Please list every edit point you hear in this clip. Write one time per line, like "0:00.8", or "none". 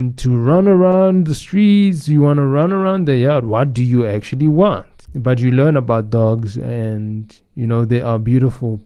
0:05.0

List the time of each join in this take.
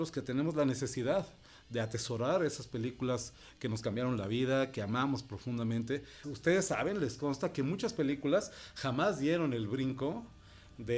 0:06.2

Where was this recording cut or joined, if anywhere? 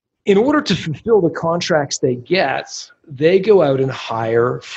none

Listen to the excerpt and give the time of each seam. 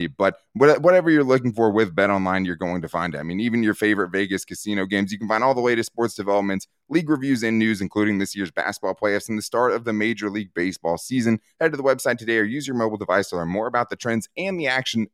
none

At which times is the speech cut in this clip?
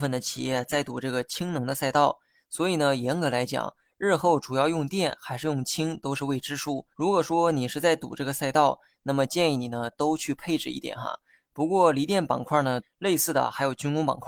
0:06.9
0:11.4
0:12.8

